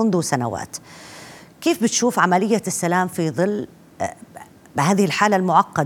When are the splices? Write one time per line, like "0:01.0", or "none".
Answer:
none